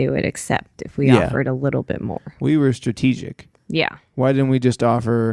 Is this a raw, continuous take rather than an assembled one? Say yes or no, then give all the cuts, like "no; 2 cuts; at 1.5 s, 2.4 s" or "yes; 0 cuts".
no; 1 cut; at 3.5 s